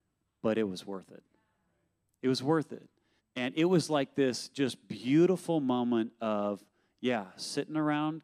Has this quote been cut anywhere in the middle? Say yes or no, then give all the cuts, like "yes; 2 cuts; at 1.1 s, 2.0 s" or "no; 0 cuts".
yes; 1 cut; at 3.2 s